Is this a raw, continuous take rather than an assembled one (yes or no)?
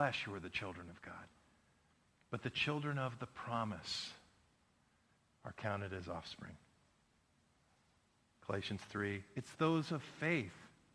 yes